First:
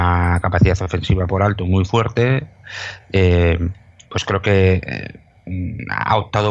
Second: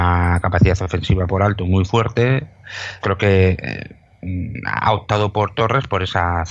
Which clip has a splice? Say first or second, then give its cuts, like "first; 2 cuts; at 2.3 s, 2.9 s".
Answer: second; 1 cut; at 3.0 s